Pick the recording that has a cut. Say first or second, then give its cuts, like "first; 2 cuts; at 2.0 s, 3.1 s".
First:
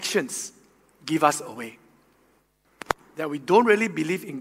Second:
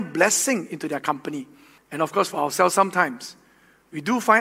second; 1 cut; at 1.8 s